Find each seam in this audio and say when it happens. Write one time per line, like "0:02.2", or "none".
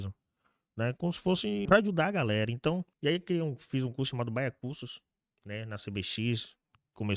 0:01.7
0:02.9